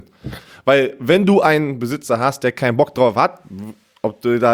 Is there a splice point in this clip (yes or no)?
no